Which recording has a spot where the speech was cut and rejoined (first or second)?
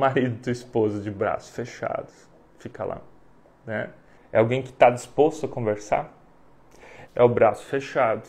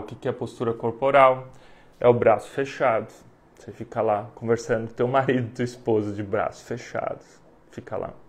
first